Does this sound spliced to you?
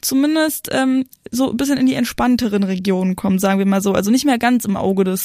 no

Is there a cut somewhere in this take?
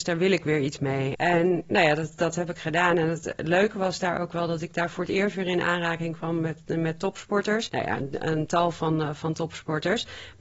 yes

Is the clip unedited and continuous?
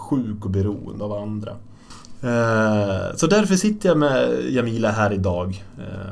yes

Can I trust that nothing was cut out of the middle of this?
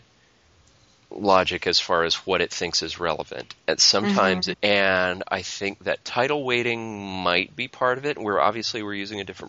no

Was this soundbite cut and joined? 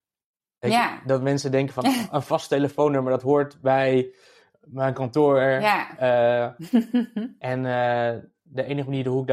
no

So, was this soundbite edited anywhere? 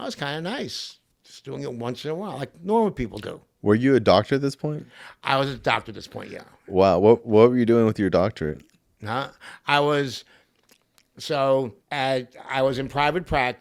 yes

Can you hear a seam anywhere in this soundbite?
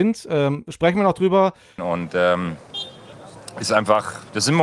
yes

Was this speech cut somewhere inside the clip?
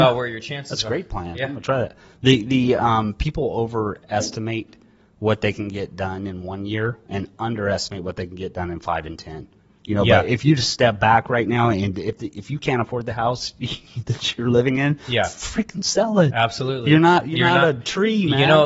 no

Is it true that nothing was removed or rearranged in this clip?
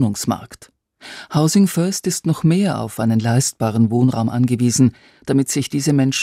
yes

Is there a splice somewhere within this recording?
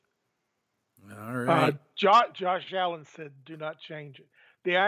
no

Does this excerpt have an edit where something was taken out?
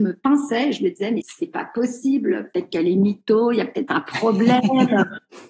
yes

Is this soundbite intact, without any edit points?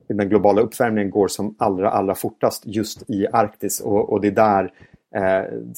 yes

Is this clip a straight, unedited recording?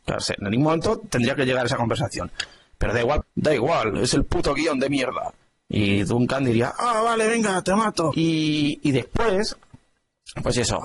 no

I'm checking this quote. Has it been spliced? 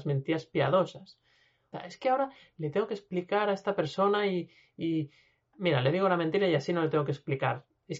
yes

